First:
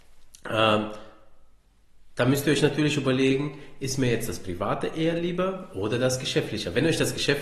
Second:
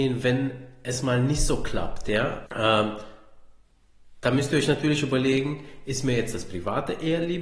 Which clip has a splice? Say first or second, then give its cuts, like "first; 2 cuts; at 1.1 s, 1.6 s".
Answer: second; 1 cut; at 2.5 s